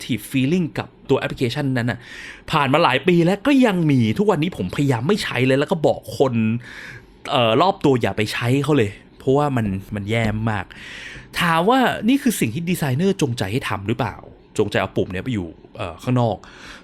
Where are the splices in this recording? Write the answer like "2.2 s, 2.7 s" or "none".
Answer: none